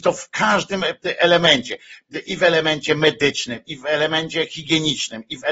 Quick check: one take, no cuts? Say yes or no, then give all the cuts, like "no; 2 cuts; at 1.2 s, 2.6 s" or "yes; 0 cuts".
yes; 0 cuts